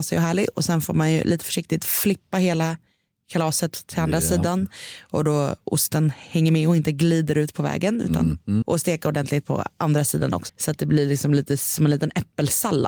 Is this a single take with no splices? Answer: no; 2 cuts; at 8.6 s, 10.5 s

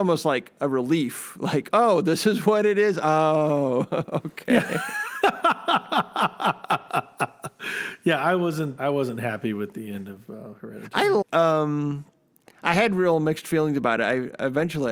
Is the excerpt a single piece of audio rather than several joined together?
no; 2 cuts; at 8.8 s, 11.2 s

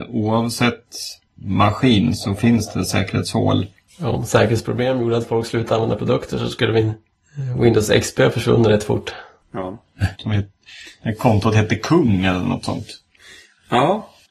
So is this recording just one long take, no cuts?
no; 2 cuts; at 3.9 s, 10.1 s

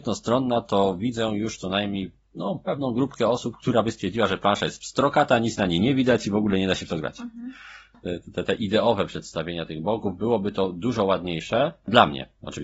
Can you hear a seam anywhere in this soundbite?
yes; 1 cut; at 7.9 s

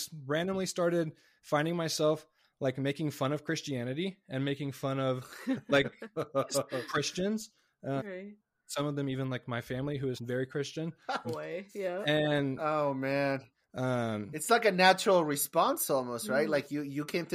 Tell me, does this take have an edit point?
yes; 3 cuts; at 8.0 s, 10.2 s, 11.2 s

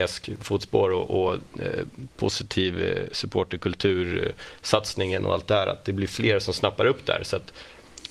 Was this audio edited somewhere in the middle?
no; 0 cuts

